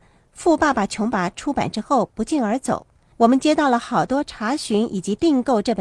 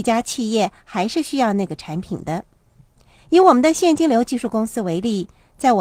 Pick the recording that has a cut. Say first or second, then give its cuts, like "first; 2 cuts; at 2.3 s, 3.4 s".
first; 1 cut; at 1.1 s